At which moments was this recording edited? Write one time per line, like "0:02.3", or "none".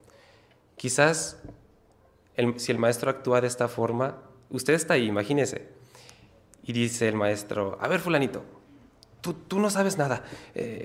none